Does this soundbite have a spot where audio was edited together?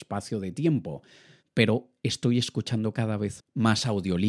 yes; 2 cuts; at 1.4 s, 3.4 s

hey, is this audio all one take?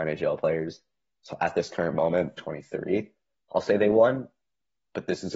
no; 1 cut; at 2.4 s

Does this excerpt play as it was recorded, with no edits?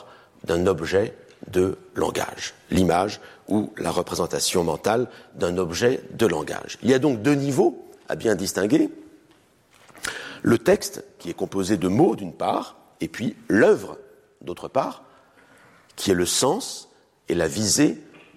yes; 0 cuts

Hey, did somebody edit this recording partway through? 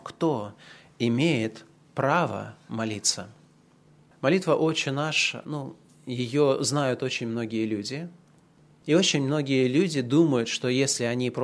no; 0 cuts

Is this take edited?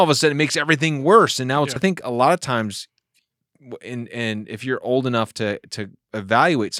yes; 1 cut; at 1.8 s

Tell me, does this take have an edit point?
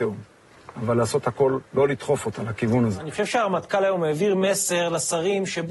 yes; 1 cut; at 1.7 s

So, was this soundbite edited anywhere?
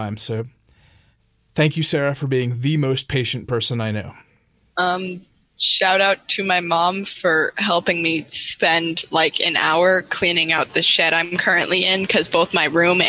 no; 0 cuts

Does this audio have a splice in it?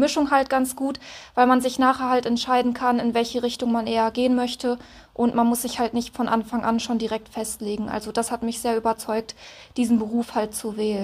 no; 0 cuts

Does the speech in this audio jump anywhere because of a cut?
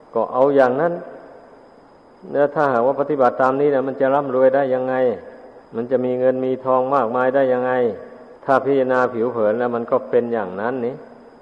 yes; 2 cuts; at 5.7 s, 8.4 s

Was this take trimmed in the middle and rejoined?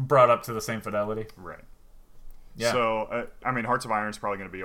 yes; 1 cut; at 3.4 s

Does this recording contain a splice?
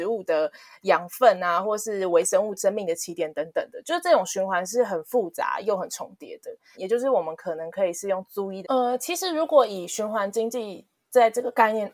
yes; 2 cuts; at 6.7 s, 8.6 s

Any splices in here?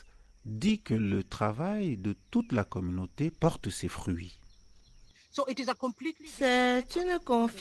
no; 0 cuts

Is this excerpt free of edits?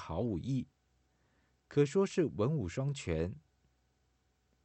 yes; 0 cuts

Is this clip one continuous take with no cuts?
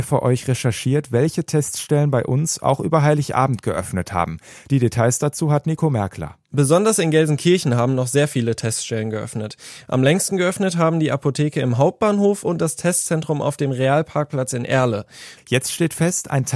no; 1 cut; at 15.4 s

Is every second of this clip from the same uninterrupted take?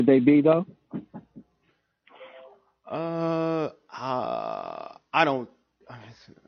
yes; 0 cuts

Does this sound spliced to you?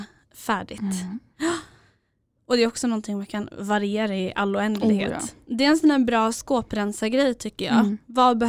no; 0 cuts

